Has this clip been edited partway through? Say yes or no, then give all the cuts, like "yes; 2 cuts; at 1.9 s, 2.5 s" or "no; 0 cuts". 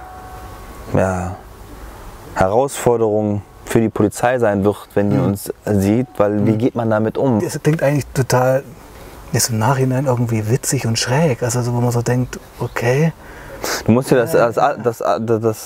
yes; 1 cut; at 7.4 s